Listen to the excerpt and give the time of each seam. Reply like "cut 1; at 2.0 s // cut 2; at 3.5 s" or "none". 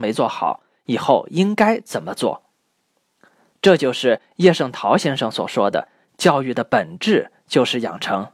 cut 1; at 3.5 s